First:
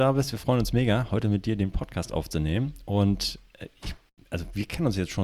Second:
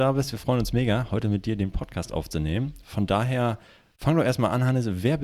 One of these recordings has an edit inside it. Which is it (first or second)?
second